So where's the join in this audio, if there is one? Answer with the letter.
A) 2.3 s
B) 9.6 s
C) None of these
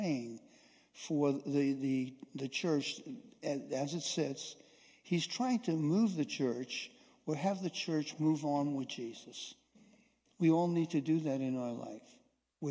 C